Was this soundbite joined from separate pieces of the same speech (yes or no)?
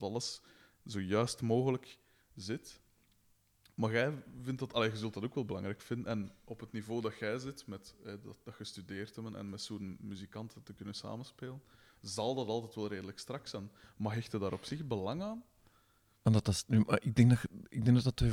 no